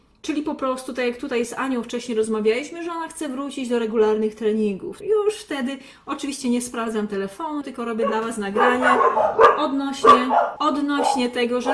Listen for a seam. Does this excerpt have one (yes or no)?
yes